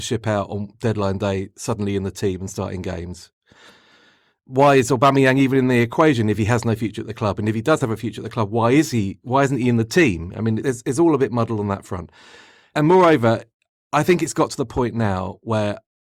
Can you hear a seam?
yes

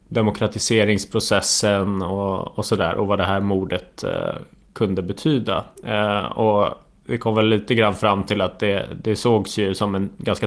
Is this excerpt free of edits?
yes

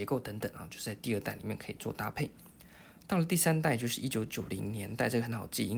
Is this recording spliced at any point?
no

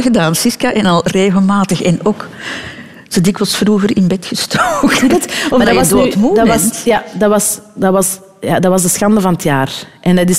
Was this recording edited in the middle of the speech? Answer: no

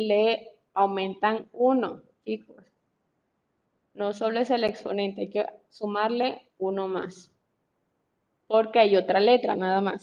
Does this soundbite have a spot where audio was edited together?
no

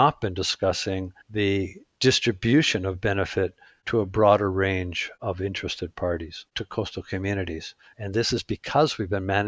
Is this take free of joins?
no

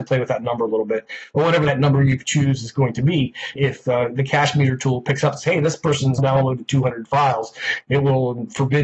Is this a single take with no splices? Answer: no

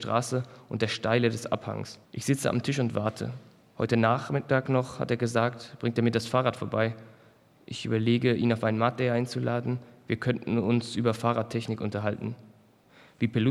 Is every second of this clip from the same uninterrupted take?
no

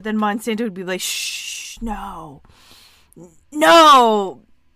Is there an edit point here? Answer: no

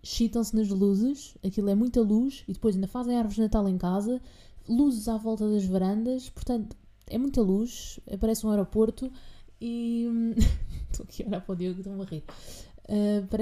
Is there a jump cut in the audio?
no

